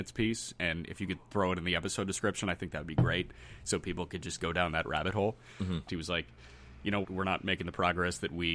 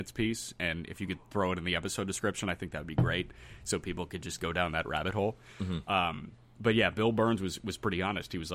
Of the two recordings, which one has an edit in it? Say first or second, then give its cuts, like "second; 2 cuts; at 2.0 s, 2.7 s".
first; 2 cuts; at 5.9 s, 7.0 s